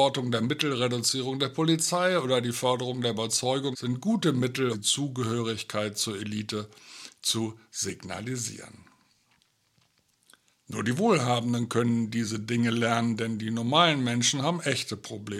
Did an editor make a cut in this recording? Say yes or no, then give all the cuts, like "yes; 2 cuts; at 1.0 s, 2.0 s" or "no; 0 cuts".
yes; 3 cuts; at 3.7 s, 4.7 s, 10.6 s